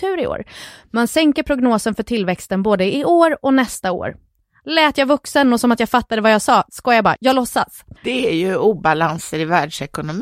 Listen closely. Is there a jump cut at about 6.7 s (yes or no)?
yes